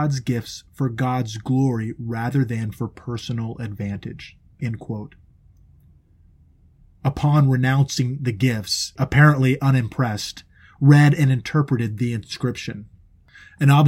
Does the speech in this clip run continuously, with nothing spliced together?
no; 1 cut; at 9.0 s

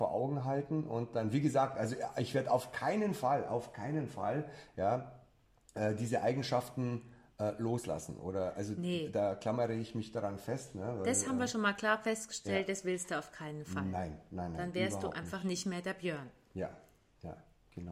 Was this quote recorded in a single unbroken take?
yes; 0 cuts

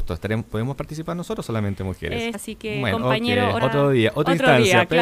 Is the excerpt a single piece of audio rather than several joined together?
no; 2 cuts; at 2.3 s, 3.6 s

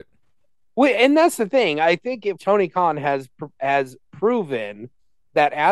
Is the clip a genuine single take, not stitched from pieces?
no; 1 cut; at 2.4 s

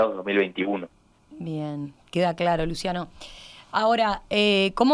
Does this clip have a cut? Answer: no; 0 cuts

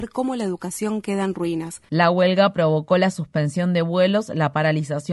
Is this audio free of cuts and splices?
no; 1 cut; at 1.9 s

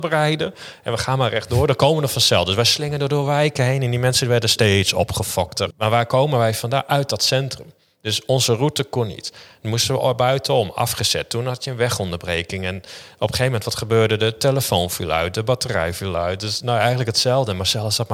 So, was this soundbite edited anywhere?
yes; 1 cut; at 5.7 s

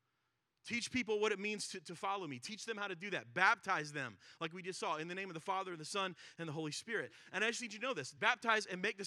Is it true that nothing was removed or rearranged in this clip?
no; 1 cut; at 8.2 s

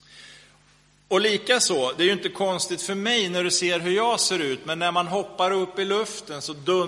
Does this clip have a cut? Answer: no; 0 cuts

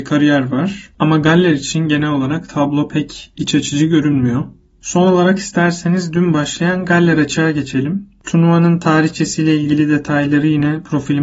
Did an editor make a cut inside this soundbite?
no; 0 cuts

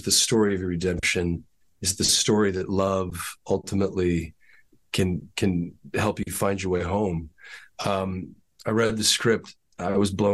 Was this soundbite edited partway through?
no; 0 cuts

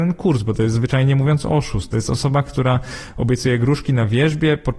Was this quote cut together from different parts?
no; 0 cuts

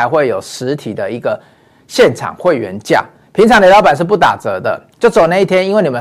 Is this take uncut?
yes; 0 cuts

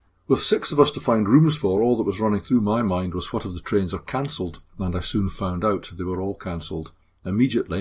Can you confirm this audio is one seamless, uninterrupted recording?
yes; 0 cuts

